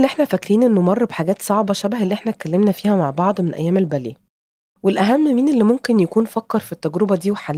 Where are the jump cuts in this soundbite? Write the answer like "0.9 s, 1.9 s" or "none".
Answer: none